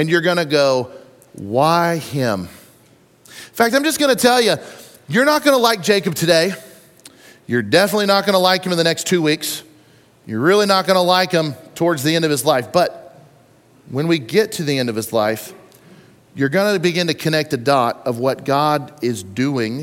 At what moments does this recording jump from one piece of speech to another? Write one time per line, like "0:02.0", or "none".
none

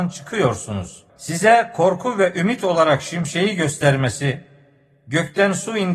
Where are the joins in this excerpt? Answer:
0:01.1

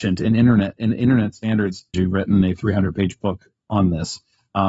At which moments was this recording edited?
0:01.9

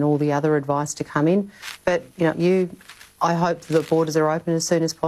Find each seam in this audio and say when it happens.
0:02.3

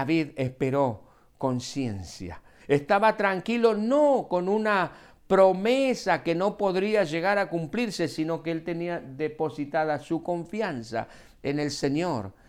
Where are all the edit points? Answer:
0:02.6

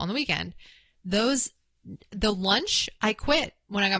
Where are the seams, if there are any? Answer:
none

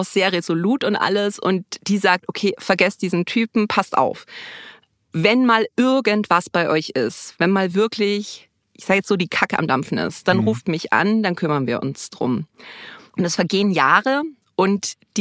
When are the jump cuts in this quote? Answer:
none

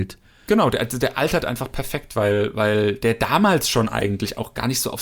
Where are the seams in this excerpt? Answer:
none

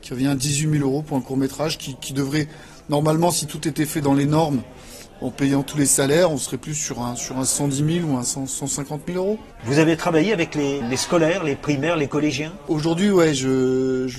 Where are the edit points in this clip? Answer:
0:09.6
0:10.8

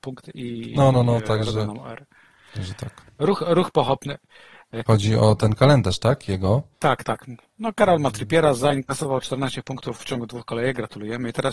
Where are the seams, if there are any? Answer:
0:04.9
0:06.7

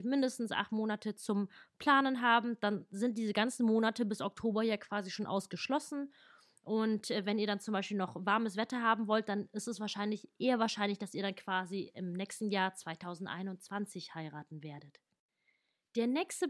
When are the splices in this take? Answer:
none

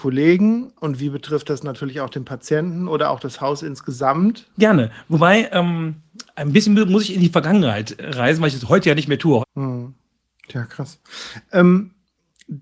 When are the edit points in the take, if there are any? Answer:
0:04.5
0:09.4

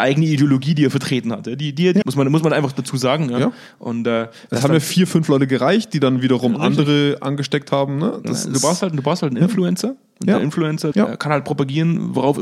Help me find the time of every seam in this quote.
0:02.0
0:10.9

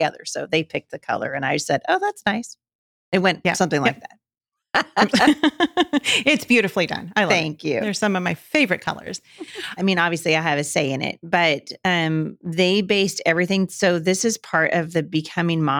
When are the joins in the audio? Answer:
0:09.8

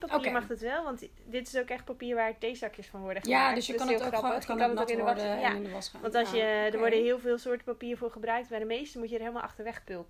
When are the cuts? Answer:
none

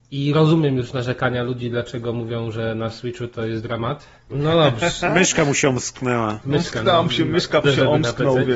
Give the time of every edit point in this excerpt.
0:04.3
0:07.6

